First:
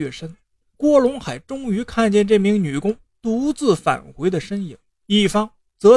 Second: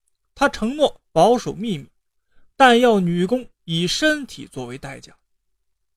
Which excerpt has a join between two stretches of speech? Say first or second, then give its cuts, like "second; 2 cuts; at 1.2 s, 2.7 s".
first; 1 cut; at 5.0 s